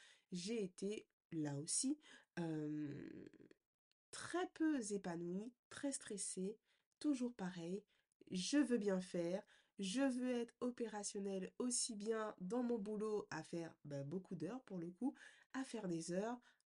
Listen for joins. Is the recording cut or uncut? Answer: uncut